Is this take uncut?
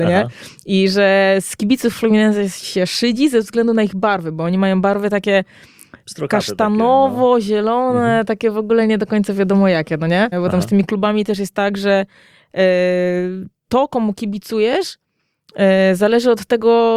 no; 1 cut; at 10.3 s

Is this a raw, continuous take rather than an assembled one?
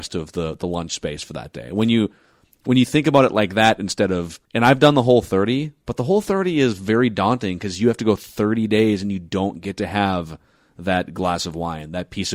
no; 1 cut; at 4.5 s

